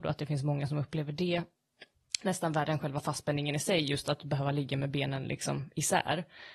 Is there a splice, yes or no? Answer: no